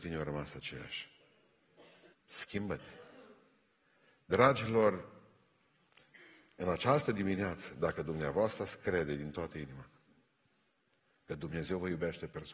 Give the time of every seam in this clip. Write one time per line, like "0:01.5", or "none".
0:02.1